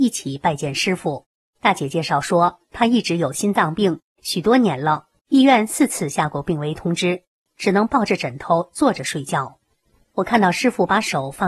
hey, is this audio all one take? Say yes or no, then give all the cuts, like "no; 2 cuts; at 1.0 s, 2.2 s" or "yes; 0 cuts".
no; 2 cuts; at 5.2 s, 7.5 s